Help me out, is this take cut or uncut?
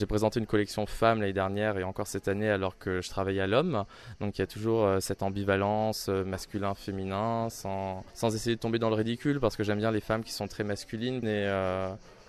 cut